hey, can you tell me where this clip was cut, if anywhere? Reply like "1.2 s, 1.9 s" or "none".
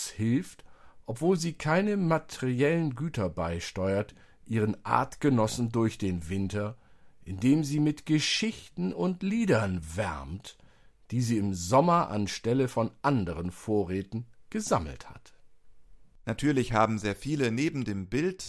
16.2 s